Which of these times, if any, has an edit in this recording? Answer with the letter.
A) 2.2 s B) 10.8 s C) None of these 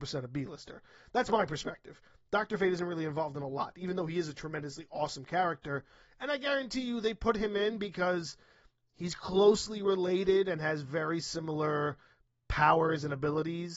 C